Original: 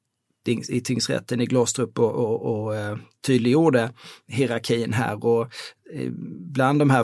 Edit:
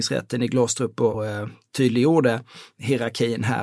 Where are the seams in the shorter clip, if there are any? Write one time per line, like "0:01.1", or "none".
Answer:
0:01.1